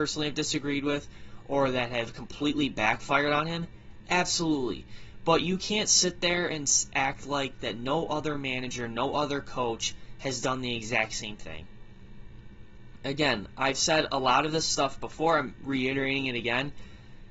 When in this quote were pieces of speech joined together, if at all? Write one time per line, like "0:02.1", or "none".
none